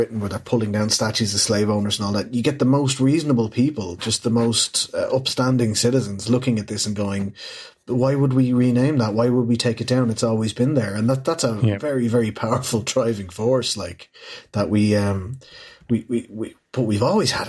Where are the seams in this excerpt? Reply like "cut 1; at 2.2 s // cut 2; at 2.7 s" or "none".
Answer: none